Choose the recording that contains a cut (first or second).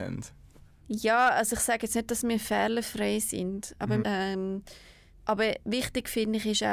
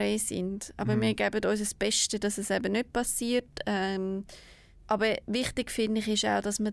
first